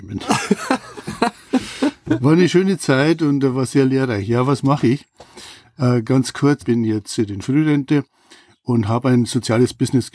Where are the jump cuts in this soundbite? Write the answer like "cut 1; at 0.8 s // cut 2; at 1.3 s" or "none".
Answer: cut 1; at 6.6 s